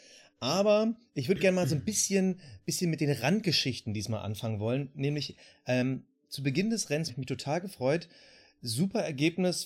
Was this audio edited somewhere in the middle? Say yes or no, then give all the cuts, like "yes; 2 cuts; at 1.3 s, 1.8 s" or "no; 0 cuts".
yes; 1 cut; at 7.1 s